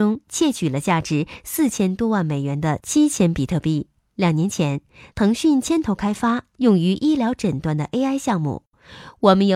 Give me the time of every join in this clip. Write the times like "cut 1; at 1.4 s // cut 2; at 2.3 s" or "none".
cut 1; at 4.1 s